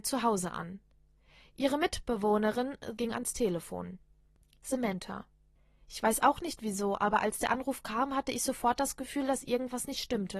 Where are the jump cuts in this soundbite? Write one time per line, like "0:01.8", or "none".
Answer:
0:03.0